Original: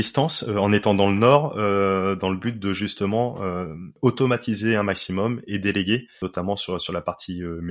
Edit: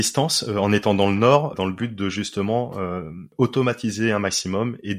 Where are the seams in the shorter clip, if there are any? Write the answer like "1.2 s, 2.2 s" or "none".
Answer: 1.5 s